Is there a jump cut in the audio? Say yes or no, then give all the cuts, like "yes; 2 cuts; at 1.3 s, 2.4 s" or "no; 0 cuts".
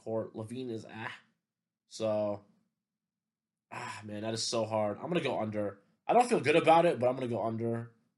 no; 0 cuts